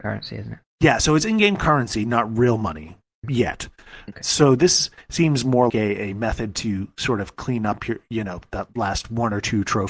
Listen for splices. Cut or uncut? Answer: cut